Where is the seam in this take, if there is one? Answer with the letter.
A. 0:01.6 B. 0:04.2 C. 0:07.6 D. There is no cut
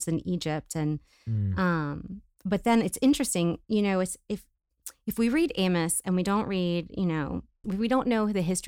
C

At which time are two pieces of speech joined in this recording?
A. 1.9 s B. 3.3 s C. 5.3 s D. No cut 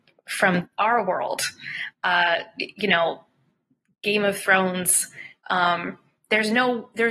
D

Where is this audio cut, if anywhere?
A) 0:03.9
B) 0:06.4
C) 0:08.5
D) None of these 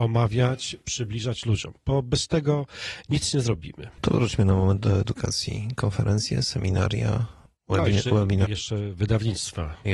C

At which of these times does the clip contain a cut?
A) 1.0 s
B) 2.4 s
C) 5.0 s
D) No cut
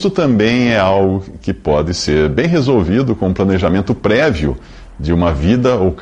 D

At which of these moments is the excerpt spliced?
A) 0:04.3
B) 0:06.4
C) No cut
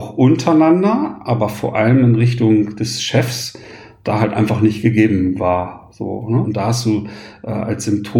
B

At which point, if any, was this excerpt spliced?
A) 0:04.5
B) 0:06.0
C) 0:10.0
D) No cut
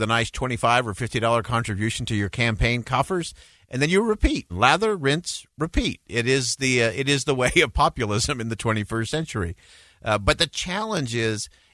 A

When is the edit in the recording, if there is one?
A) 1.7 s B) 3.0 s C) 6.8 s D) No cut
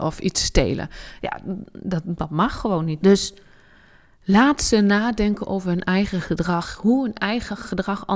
B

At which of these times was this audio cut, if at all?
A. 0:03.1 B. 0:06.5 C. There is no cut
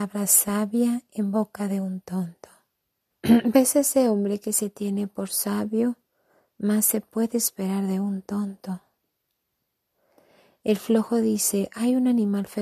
A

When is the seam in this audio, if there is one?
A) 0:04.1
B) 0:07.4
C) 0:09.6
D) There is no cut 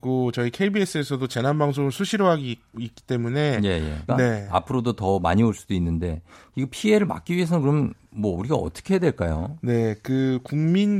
A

